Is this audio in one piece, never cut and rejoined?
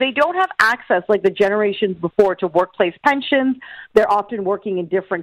yes; 0 cuts

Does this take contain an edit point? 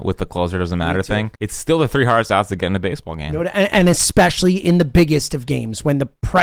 yes; 1 cut; at 1.4 s

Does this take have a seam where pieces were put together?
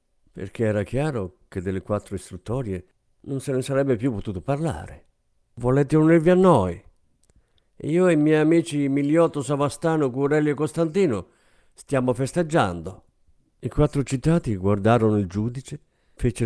yes; 1 cut; at 5.4 s

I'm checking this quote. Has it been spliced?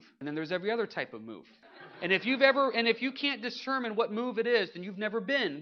no; 0 cuts

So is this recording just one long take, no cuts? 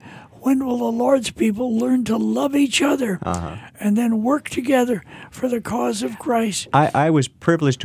yes; 0 cuts

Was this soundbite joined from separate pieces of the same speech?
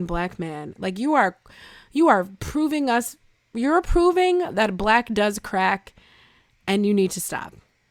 no; 0 cuts

